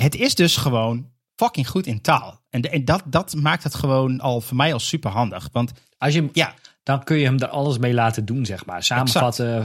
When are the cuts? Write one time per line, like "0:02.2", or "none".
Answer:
0:06.3